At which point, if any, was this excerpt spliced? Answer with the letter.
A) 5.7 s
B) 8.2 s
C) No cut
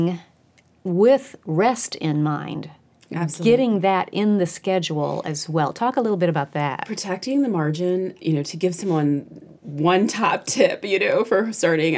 B